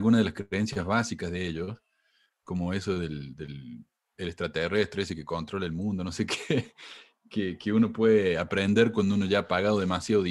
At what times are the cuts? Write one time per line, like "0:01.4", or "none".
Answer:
none